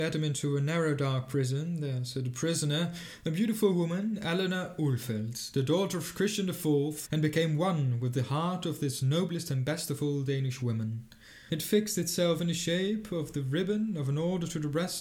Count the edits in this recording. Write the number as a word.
two